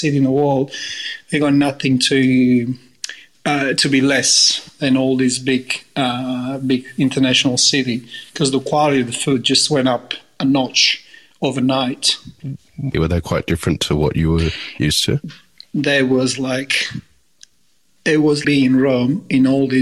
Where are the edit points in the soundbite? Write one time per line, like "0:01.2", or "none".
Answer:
0:12.9
0:18.4